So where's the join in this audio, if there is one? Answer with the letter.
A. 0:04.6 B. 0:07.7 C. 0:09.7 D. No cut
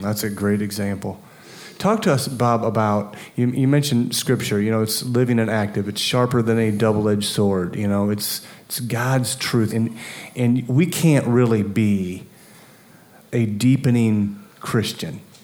C